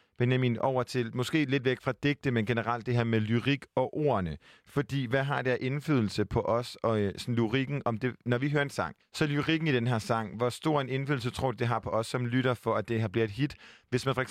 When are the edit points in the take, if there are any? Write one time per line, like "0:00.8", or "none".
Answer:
0:09.0